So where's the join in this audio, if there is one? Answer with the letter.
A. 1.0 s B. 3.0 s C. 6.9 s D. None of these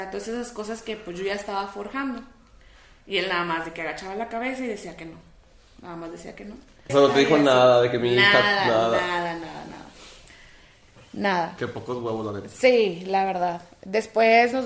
C